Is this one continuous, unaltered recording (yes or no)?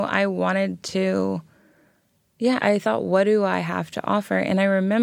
no